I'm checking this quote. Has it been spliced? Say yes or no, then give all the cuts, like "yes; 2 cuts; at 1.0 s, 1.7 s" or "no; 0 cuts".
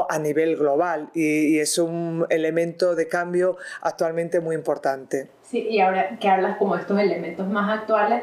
no; 0 cuts